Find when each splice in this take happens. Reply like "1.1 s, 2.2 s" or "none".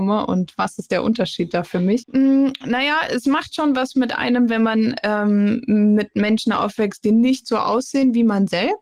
2.0 s